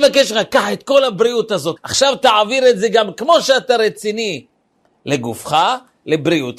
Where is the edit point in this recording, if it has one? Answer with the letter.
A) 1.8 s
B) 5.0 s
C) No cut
A